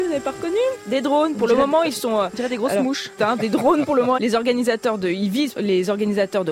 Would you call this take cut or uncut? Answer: cut